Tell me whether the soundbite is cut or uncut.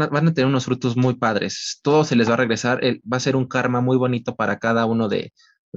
uncut